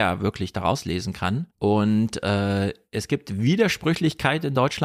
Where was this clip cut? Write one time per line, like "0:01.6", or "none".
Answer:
0:01.5